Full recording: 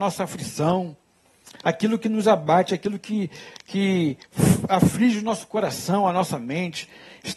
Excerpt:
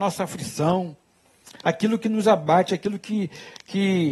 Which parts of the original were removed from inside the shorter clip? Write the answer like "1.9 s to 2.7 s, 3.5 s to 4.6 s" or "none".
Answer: none